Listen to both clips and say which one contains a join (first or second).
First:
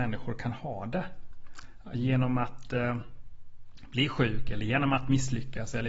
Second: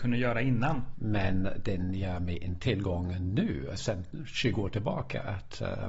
second